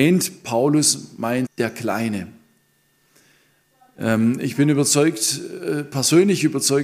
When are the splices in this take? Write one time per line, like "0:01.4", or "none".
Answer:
0:01.5